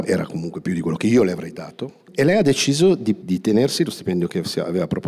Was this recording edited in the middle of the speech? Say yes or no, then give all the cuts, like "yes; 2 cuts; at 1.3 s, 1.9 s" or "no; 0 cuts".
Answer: yes; 1 cut; at 3.2 s